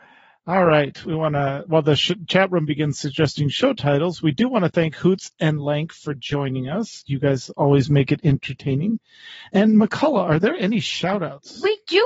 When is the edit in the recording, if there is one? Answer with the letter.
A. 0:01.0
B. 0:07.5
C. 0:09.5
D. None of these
A